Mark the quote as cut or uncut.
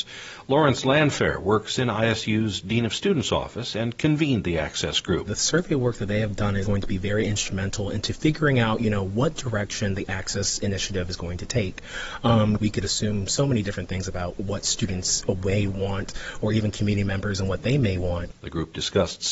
cut